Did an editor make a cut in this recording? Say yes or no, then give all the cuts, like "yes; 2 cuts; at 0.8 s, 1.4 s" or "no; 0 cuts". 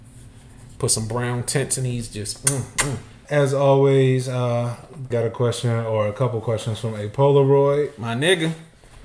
yes; 2 cuts; at 3.3 s, 5.1 s